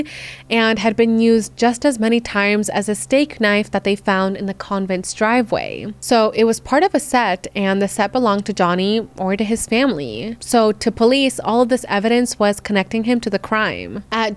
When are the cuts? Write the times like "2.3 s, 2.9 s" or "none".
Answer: none